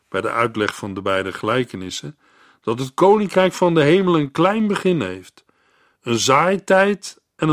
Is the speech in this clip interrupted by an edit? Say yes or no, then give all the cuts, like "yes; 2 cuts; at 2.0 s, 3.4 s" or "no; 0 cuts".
no; 0 cuts